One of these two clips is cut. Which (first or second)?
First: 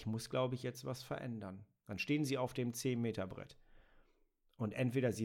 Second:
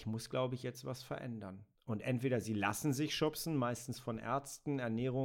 second